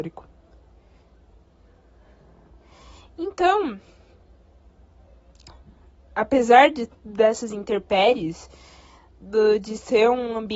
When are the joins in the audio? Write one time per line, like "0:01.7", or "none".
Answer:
none